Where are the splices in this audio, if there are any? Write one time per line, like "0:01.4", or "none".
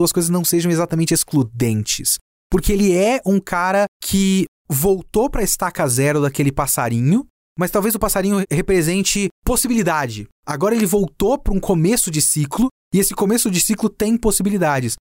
none